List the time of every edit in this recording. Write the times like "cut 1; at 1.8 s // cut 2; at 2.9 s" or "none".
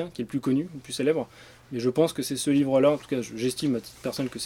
none

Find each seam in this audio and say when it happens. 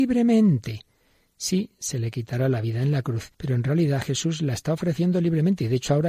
cut 1; at 3.3 s

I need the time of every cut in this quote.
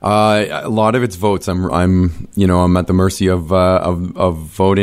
cut 1; at 1.7 s

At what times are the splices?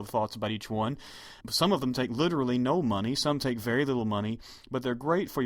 cut 1; at 1.4 s

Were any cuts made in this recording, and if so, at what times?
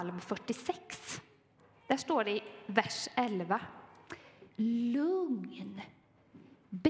cut 1; at 4.5 s

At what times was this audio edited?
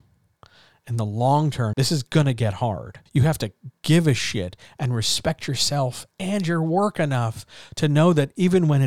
cut 1; at 1.7 s // cut 2; at 3.1 s

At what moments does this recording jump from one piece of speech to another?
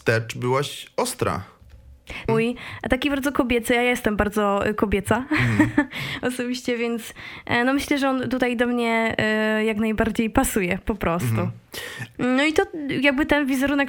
cut 1; at 2.3 s // cut 2; at 12.2 s

